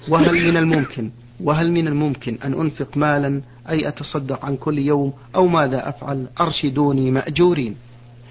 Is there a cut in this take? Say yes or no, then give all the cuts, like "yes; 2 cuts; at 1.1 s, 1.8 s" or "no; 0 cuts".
yes; 1 cut; at 1.3 s